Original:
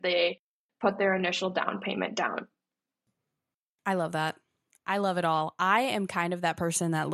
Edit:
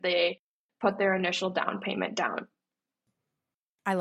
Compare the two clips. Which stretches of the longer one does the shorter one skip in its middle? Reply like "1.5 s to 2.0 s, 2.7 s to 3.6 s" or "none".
none

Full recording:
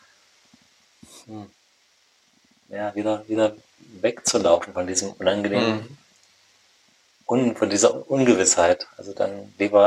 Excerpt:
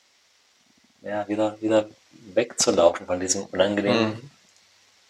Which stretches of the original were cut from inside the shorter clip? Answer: none

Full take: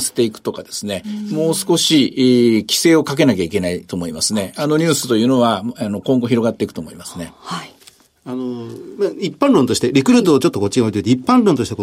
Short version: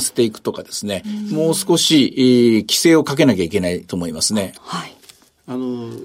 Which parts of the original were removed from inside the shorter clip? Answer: 4.6 s to 7.3 s

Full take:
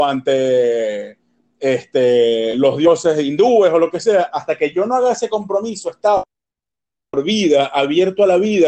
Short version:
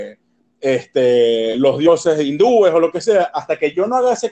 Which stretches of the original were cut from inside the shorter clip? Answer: none

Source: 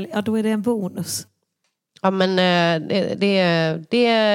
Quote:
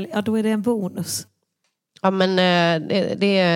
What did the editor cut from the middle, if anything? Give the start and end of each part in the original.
none

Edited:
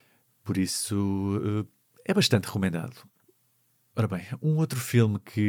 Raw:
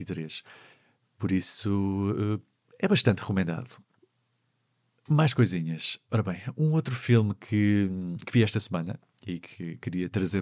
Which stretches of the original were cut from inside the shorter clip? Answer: 4.7 s to 6.1 s

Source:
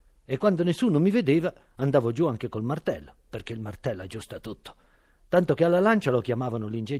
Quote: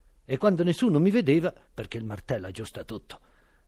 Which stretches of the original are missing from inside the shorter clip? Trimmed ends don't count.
1.7 s to 3.2 s

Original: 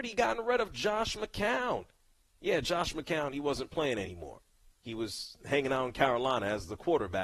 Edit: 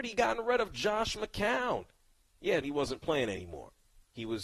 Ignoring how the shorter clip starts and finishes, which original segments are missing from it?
2.6 s to 3.3 s

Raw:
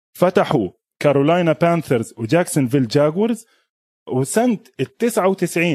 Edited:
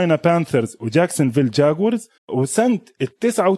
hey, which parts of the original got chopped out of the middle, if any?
3.5 s to 4.0 s

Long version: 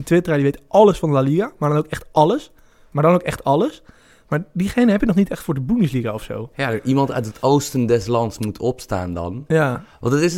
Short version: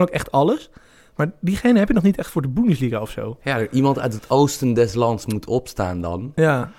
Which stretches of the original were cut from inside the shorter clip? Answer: none

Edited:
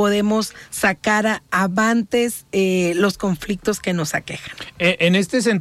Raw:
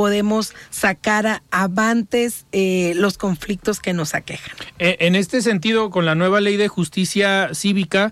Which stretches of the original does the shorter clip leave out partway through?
none

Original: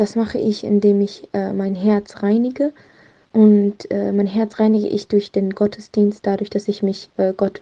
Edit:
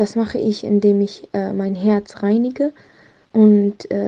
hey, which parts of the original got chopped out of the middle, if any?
none

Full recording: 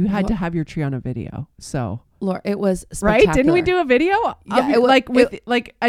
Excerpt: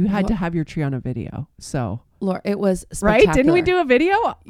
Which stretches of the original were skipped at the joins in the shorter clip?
none

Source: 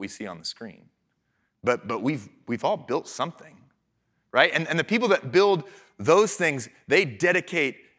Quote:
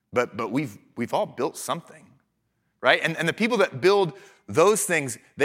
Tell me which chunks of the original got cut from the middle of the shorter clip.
none

